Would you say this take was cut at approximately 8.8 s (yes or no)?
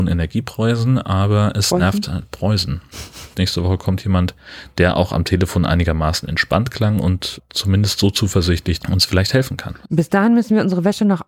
yes